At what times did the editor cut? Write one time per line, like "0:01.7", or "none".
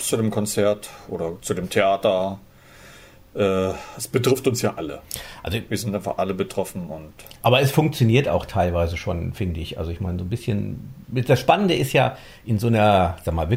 none